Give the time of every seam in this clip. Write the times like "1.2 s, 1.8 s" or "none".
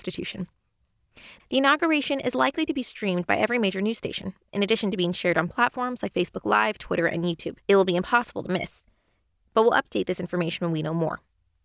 1.4 s, 7.6 s